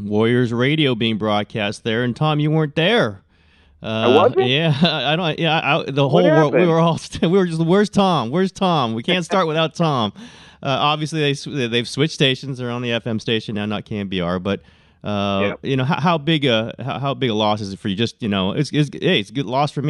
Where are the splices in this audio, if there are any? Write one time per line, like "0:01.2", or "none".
none